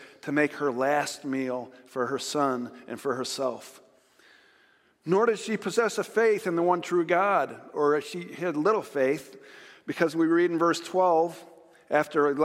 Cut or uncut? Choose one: uncut